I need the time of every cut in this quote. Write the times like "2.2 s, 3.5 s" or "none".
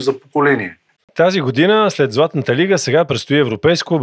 1.0 s